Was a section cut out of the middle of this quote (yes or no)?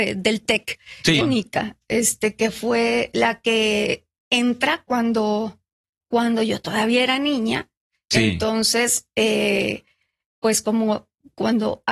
yes